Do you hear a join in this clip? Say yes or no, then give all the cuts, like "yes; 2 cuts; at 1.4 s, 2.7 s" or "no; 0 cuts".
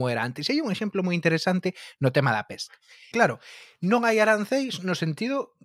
yes; 1 cut; at 3.1 s